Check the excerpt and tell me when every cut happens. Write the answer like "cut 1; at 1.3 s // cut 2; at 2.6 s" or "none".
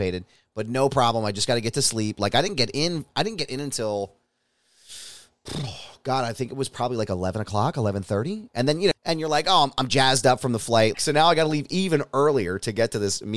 cut 1; at 8.9 s // cut 2; at 10.9 s